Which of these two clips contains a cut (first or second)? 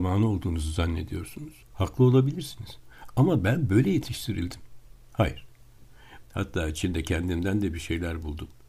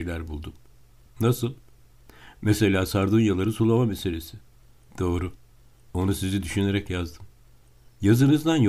first